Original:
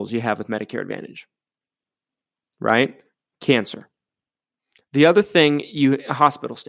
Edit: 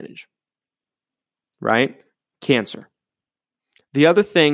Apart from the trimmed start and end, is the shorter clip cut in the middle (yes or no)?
no